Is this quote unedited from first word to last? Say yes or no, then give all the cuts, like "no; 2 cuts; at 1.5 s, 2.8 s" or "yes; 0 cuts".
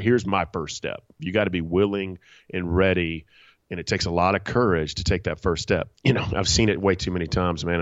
no; 2 cuts; at 1.2 s, 5.9 s